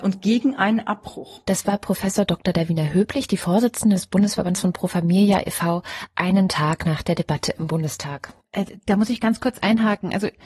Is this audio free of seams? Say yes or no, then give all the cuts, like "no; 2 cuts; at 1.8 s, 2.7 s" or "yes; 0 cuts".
yes; 0 cuts